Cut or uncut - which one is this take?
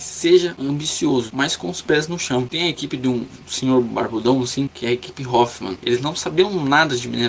uncut